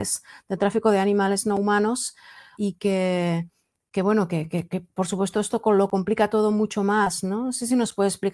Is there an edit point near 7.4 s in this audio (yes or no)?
no